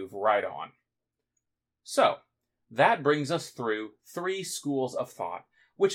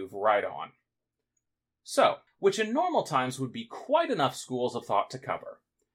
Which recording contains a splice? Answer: second; 1 cut; at 2.3 s

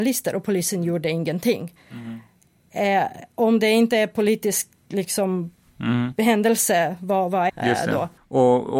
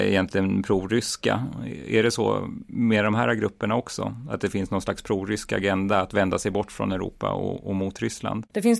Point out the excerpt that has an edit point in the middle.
first; 1 cut; at 7.5 s

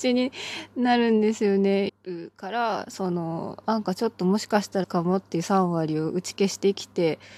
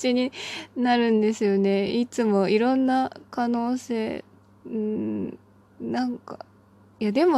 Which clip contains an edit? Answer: first; 2 cuts; at 1.9 s, 4.8 s

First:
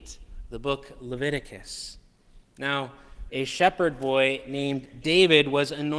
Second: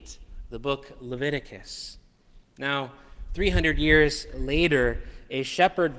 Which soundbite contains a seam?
first; 1 cut; at 3.3 s

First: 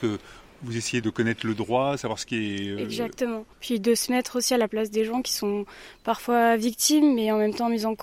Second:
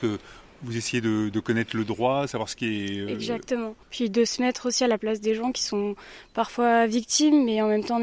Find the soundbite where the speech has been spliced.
first; 1 cut; at 1.0 s

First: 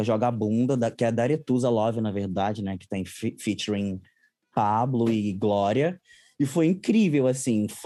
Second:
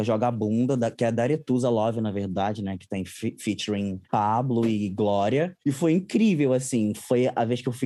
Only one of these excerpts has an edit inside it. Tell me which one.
second; 2 cuts; at 4.0 s, 5.6 s

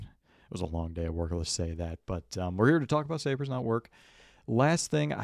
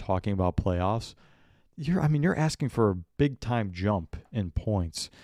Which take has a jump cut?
first; 1 cut; at 1.5 s

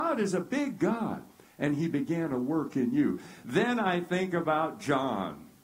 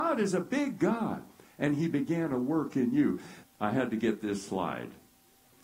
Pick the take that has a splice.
second; 1 cut; at 3.4 s

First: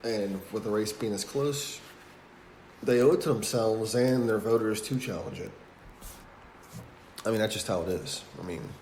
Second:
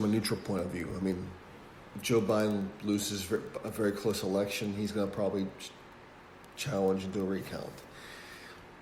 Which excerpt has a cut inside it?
first; 1 cut; at 2.7 s

